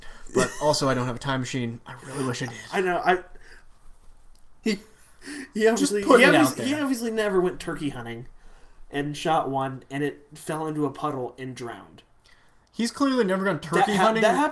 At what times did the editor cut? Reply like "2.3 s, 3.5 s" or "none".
4.6 s